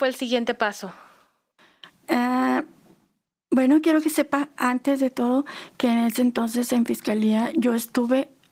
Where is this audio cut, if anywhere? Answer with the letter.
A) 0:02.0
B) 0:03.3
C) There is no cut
A